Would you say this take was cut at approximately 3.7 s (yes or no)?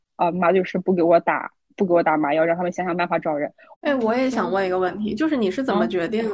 yes